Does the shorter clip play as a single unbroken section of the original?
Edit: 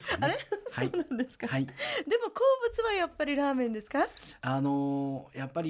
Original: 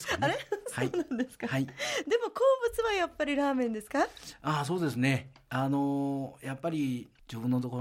no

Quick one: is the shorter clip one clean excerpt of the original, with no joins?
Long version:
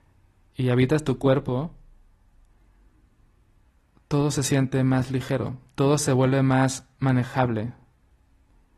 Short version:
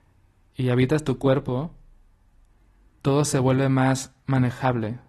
no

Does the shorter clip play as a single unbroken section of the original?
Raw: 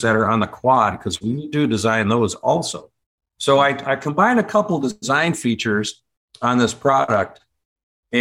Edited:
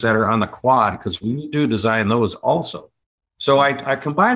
yes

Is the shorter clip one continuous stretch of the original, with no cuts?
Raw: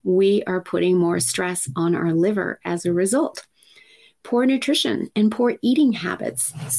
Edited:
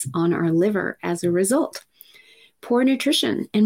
yes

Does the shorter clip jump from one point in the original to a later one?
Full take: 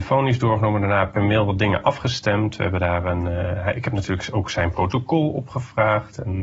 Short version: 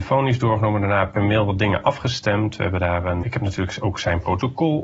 yes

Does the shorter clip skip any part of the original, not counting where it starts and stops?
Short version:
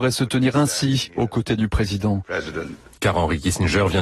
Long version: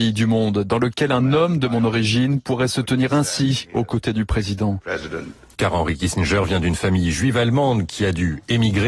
no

